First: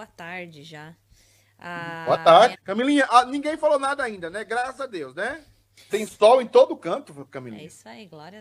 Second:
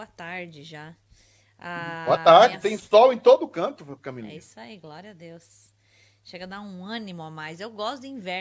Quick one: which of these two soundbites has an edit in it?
first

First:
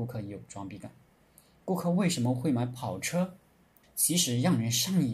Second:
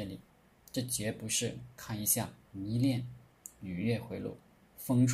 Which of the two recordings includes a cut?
first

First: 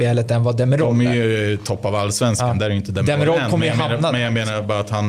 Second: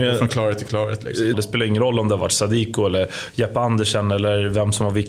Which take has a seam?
second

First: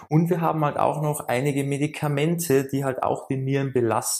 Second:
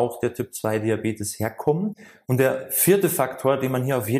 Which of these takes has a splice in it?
second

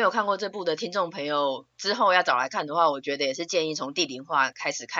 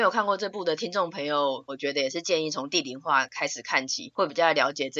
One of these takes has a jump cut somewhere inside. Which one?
second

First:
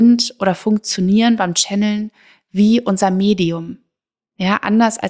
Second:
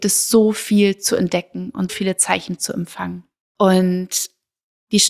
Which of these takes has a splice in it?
second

